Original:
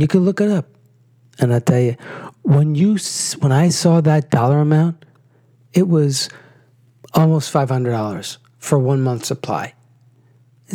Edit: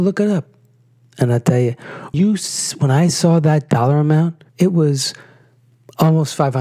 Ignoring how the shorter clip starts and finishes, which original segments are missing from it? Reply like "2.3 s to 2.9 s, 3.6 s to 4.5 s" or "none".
2.3 s to 2.8 s, 5.1 s to 5.6 s